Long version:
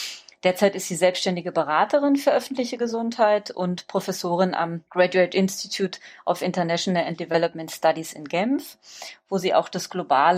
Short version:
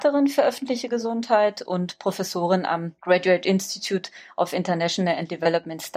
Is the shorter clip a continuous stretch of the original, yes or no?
yes